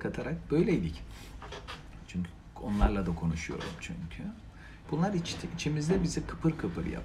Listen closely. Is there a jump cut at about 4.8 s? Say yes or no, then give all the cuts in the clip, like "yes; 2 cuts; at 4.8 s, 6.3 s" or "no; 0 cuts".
yes; 1 cut; at 4.8 s